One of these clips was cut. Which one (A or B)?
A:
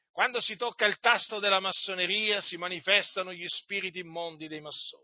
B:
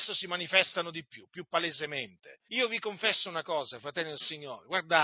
B